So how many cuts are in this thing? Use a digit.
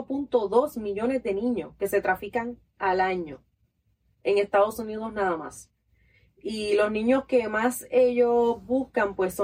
0